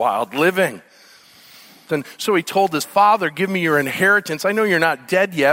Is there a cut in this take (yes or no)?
yes